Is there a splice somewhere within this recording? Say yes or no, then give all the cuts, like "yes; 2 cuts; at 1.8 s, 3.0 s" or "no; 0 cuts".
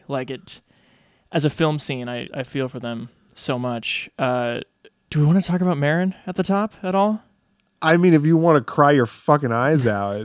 yes; 1 cut; at 2.3 s